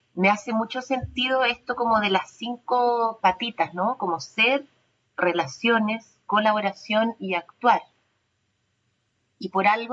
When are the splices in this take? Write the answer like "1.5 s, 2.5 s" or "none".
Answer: 5.0 s